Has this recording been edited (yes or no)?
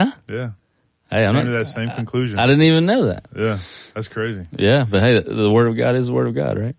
no